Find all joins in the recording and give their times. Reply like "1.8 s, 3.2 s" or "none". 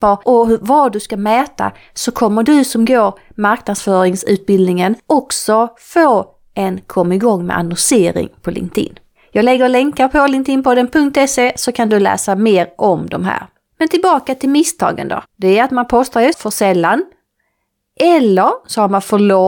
15.2 s, 16.3 s